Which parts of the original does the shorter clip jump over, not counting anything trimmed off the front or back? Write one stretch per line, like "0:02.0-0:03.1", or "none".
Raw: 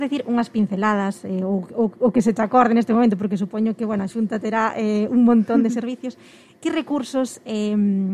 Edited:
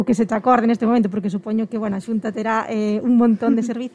none